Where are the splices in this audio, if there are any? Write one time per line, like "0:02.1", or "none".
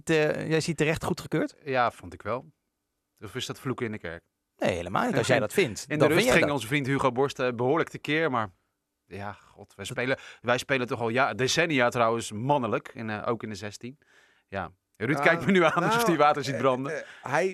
none